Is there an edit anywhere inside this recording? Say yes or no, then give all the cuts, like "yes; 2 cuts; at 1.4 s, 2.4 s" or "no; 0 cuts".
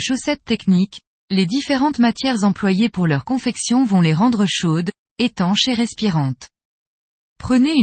yes; 1 cut; at 5.0 s